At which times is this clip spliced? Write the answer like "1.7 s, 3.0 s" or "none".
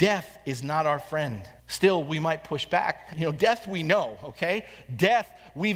1.6 s, 3.1 s